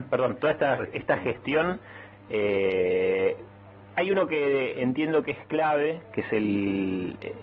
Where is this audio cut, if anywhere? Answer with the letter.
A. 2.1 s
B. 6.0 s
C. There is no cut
A